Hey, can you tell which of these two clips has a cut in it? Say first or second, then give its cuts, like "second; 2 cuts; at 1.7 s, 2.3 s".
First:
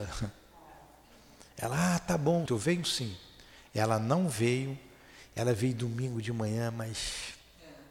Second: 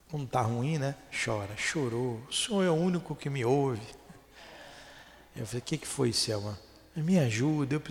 first; 1 cut; at 2.5 s